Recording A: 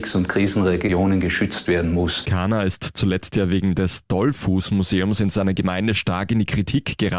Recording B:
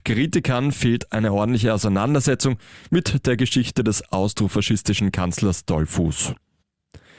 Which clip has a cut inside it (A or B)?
A